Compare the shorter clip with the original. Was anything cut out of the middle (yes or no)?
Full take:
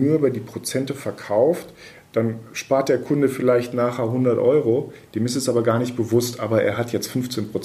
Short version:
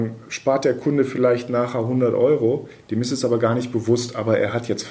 no